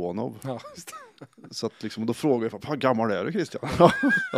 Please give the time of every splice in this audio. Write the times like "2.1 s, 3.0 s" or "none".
none